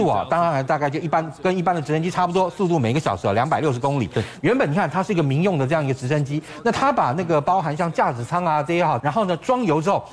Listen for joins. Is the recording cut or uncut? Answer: cut